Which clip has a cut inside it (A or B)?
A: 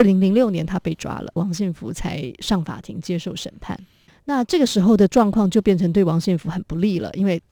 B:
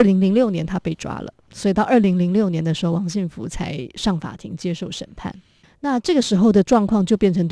A